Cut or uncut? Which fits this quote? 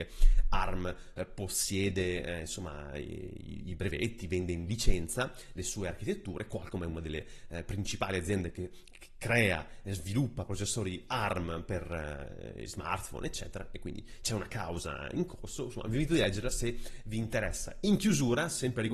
uncut